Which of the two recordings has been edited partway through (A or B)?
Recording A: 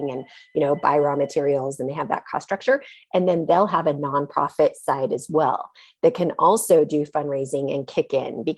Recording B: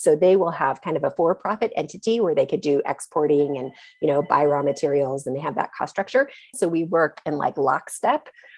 B